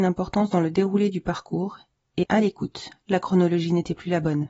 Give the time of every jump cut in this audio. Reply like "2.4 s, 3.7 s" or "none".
2.2 s

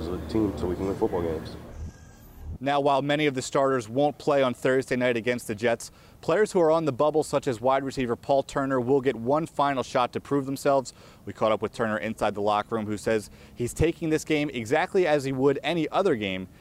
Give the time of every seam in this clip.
none

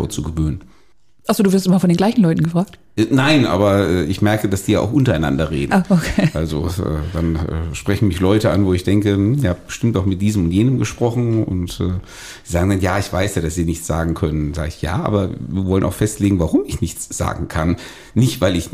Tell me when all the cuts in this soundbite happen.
none

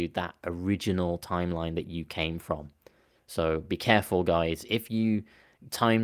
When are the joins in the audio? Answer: none

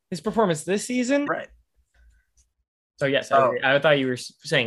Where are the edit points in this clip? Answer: 1.2 s

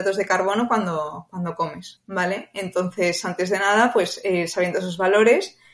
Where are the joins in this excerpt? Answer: 2.0 s

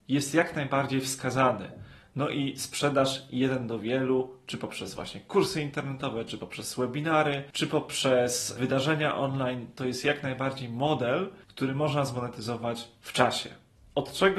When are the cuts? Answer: none

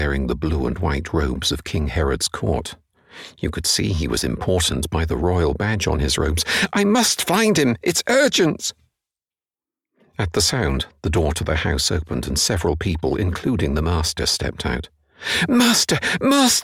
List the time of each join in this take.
none

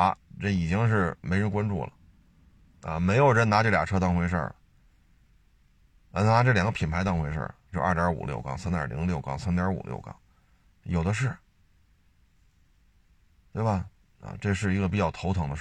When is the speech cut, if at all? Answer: 7.7 s, 14.0 s

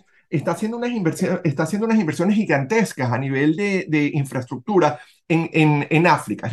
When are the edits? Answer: none

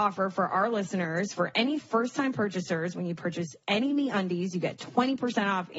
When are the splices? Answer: none

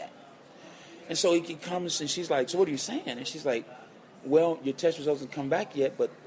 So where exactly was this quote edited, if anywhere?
2.5 s

